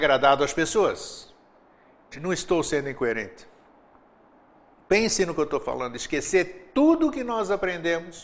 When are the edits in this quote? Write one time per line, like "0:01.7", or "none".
0:02.1